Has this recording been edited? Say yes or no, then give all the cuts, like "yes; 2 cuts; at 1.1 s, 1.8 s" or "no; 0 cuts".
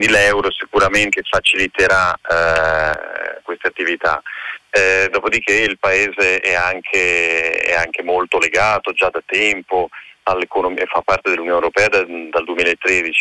yes; 1 cut; at 3.4 s